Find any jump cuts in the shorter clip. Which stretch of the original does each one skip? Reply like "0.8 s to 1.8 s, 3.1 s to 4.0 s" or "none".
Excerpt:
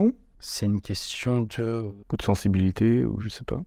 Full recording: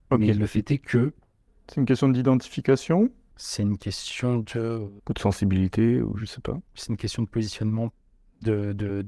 none